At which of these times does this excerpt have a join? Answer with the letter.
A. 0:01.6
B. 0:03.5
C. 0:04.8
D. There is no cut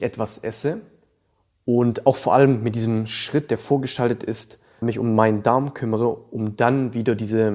C